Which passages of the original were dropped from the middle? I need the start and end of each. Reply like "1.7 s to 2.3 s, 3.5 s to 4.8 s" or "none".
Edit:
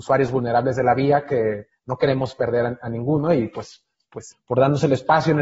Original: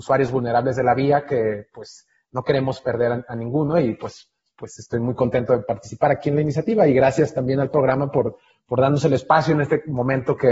1.7 s to 2.2 s, 4.8 s to 8.5 s